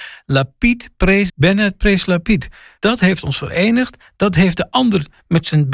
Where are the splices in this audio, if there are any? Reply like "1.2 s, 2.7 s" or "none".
1.3 s, 2.8 s